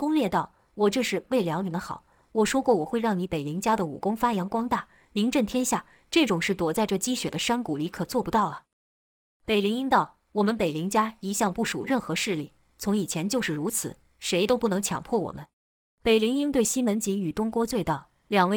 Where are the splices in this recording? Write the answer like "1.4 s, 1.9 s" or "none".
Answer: 15.5 s